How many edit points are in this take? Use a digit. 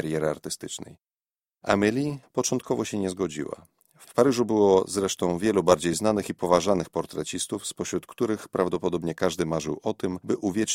1